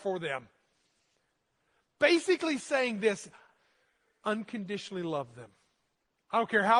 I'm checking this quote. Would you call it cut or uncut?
uncut